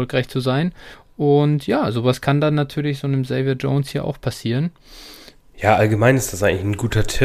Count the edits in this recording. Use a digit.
1